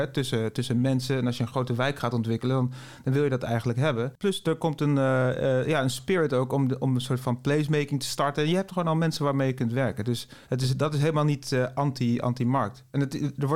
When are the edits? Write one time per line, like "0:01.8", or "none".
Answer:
0:10.4